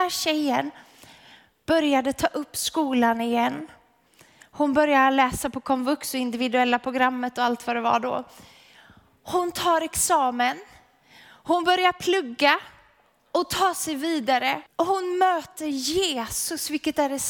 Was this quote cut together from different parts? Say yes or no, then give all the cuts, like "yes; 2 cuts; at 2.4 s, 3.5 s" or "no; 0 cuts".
yes; 1 cut; at 14.7 s